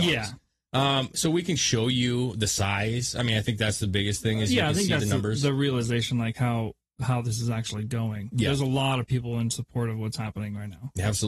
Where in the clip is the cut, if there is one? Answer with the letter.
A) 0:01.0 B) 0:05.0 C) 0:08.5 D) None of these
D